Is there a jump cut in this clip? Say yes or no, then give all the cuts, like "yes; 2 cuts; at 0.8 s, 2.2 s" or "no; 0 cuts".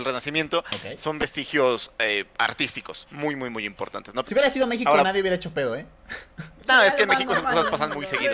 yes; 1 cut; at 4.2 s